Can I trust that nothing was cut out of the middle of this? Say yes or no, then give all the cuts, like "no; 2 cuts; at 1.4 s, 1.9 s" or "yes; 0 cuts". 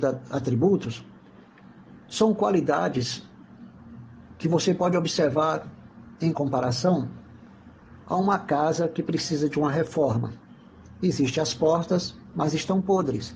yes; 0 cuts